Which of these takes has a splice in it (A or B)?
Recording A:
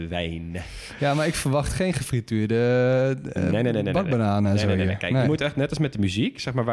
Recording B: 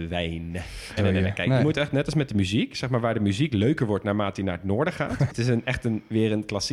B